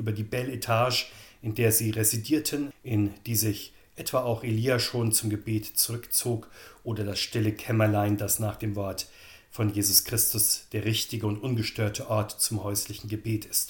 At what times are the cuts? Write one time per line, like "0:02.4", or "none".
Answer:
0:02.7

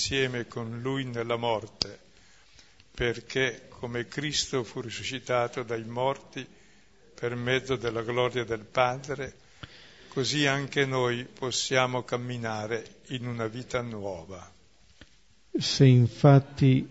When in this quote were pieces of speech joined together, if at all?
none

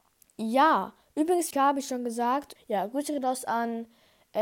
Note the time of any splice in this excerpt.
0:01.5
0:02.6

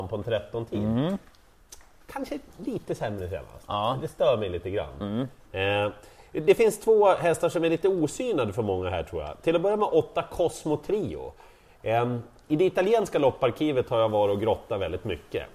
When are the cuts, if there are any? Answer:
none

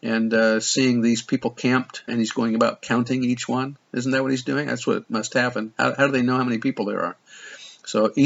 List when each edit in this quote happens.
0:02.1

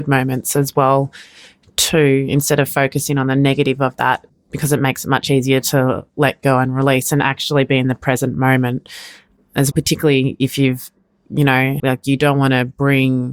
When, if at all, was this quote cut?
0:09.7
0:11.8

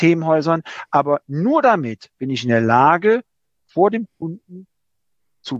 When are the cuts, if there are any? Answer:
none

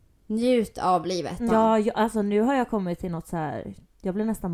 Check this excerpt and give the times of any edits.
0:01.5

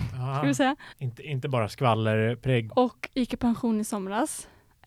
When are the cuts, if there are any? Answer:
0:00.9
0:02.7

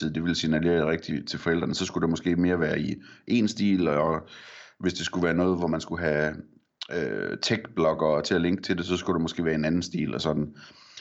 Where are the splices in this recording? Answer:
none

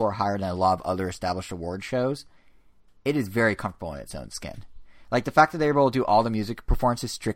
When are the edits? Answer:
none

